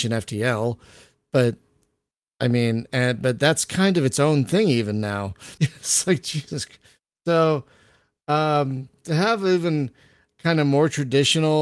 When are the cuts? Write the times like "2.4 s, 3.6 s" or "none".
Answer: 5.6 s